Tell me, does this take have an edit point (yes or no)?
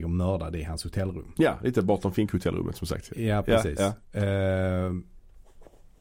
no